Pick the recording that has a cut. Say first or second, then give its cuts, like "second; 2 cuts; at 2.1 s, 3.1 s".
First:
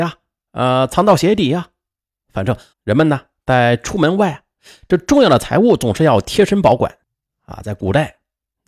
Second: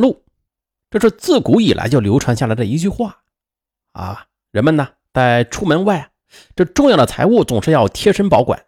first; 1 cut; at 2.7 s